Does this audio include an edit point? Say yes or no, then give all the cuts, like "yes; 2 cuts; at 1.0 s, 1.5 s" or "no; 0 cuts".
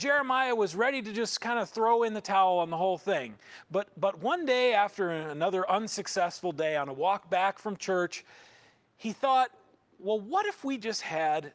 no; 0 cuts